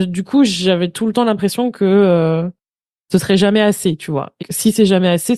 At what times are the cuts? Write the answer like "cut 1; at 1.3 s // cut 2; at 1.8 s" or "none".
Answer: cut 1; at 4.4 s